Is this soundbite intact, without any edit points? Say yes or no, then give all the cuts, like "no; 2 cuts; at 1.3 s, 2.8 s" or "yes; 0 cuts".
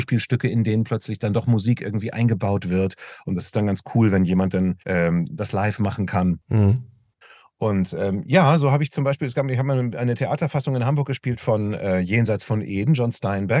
no; 1 cut; at 4.8 s